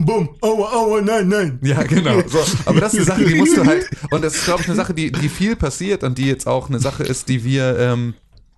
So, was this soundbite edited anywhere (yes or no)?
no